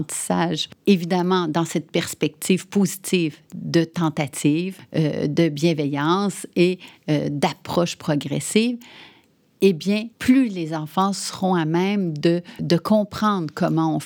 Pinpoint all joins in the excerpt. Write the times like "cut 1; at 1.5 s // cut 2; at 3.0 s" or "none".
cut 1; at 10.1 s // cut 2; at 12.6 s